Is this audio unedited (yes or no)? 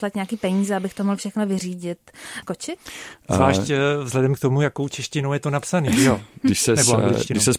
no